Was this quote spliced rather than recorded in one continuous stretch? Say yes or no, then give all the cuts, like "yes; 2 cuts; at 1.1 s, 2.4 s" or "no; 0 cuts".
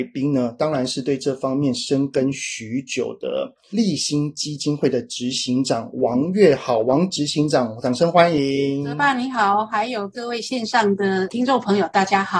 no; 0 cuts